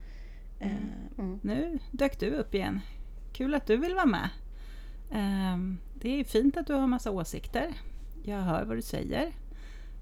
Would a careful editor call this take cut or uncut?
cut